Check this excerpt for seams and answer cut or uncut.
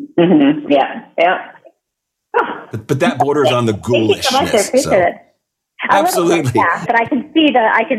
cut